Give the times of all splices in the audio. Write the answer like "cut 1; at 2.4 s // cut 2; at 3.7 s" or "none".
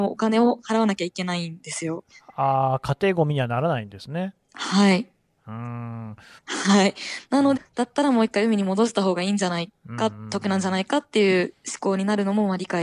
cut 1; at 6.4 s // cut 2; at 7.6 s